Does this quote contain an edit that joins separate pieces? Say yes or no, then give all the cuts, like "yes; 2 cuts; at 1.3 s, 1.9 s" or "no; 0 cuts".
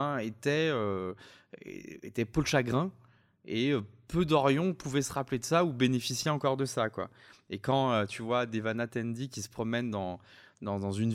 no; 0 cuts